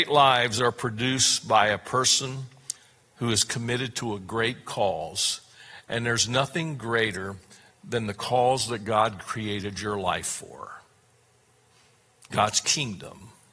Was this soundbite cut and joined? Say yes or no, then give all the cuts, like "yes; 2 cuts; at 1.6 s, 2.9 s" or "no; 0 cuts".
no; 0 cuts